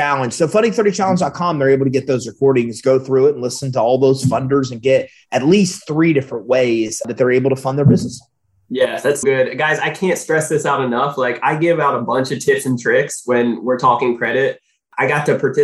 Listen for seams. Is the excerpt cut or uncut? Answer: cut